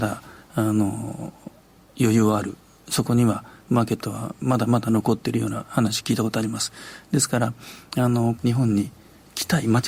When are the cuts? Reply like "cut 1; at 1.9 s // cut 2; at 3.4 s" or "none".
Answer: cut 1; at 8.4 s

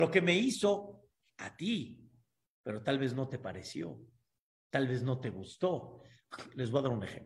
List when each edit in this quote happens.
none

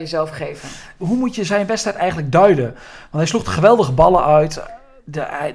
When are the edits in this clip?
cut 1; at 0.9 s

